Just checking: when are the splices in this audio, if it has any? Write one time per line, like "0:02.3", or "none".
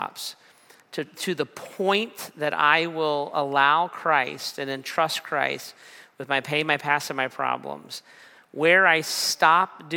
0:01.1